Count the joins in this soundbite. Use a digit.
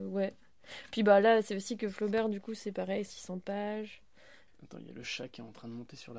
2